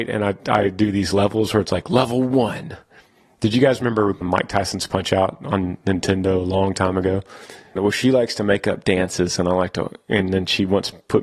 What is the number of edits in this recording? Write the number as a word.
two